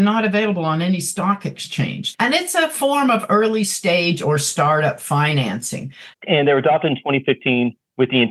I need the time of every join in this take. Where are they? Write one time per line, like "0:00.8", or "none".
0:02.1
0:06.1